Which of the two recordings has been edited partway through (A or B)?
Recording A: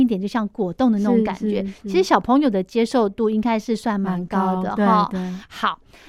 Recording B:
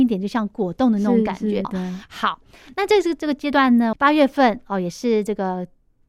B